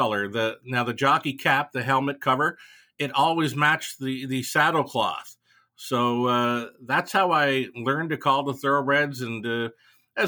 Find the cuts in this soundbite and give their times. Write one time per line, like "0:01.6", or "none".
none